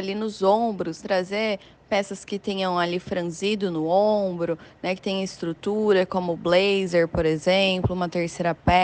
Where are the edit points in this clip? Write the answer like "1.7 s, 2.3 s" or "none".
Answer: 1.0 s